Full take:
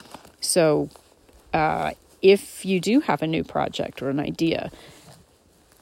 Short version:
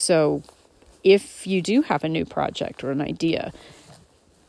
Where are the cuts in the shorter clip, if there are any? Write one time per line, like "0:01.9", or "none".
0:00.9